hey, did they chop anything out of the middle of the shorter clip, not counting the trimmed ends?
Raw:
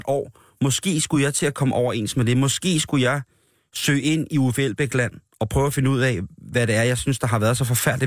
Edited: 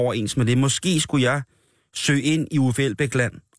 no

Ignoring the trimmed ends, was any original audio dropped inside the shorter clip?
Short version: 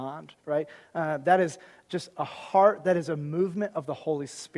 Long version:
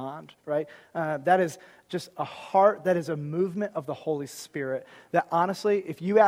no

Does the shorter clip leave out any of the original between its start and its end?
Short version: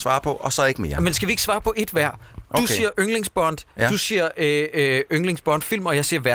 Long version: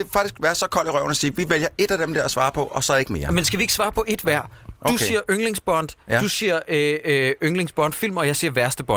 no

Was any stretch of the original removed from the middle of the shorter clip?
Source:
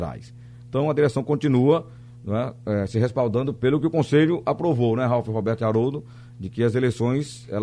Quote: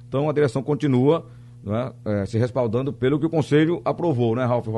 no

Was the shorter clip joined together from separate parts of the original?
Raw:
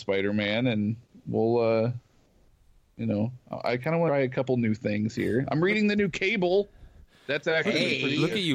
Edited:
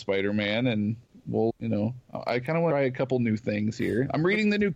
yes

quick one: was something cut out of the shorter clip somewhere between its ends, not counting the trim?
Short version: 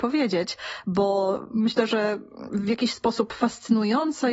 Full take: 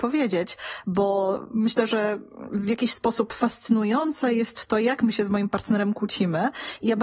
no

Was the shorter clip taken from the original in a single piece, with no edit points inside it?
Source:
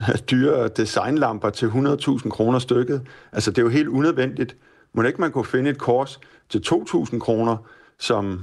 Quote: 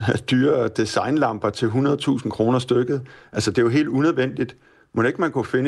yes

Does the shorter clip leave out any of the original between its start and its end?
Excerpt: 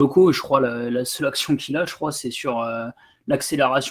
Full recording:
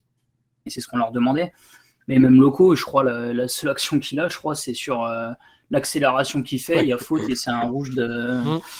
no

